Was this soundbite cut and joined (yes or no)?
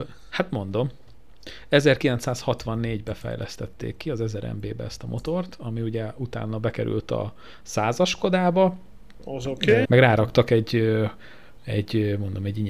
yes